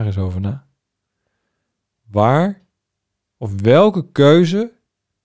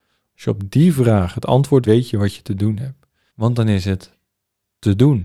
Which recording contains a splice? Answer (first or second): second